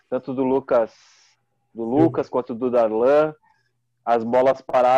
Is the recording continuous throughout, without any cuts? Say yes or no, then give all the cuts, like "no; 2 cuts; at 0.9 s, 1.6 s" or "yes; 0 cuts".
yes; 0 cuts